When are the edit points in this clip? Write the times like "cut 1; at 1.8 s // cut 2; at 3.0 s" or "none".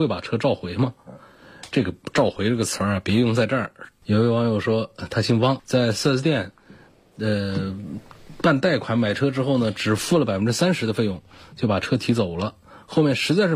cut 1; at 4.0 s // cut 2; at 5.6 s